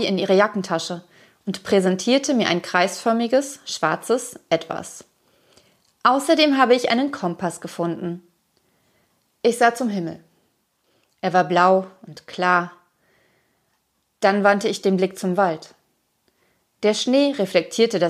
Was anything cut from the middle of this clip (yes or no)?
no